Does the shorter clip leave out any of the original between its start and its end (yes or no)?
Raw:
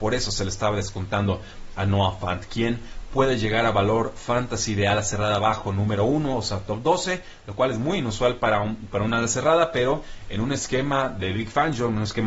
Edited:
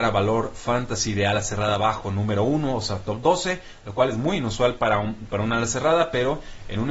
no